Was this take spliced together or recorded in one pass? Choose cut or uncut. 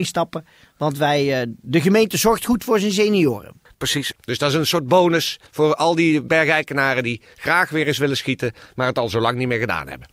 cut